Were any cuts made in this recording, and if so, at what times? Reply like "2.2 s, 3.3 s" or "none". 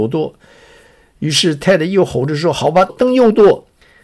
2.9 s

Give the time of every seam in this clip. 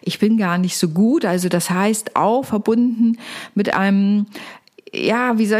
none

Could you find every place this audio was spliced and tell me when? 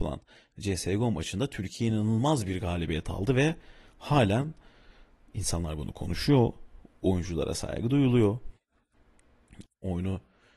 9.6 s

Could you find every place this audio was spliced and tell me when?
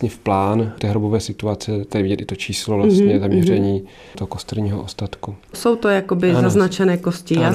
none

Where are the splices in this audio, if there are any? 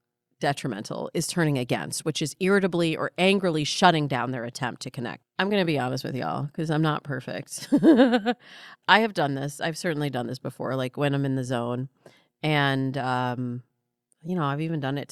5.2 s

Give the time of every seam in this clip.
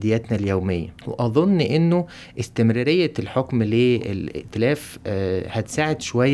1.0 s

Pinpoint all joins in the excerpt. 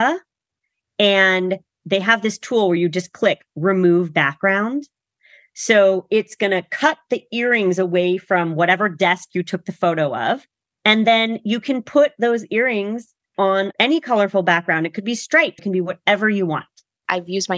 15.6 s

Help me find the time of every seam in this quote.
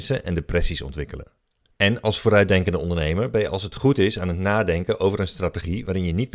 1.8 s

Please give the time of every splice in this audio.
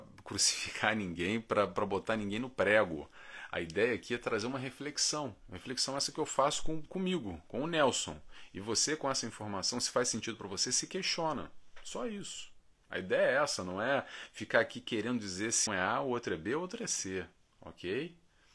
15.7 s

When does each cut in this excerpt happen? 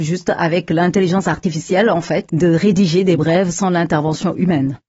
2.3 s

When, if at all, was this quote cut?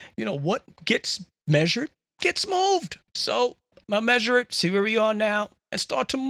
3.1 s

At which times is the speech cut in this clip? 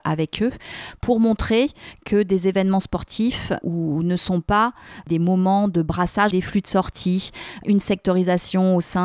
3.6 s, 6.3 s

